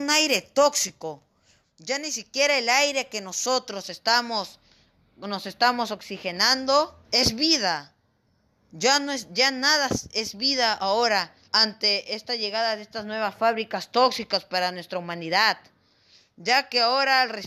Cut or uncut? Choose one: cut